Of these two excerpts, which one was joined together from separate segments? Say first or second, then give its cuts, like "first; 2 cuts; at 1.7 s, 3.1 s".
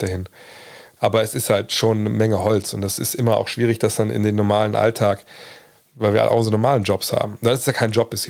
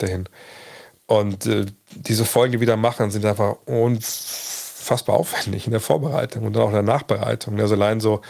first; 1 cut; at 1.0 s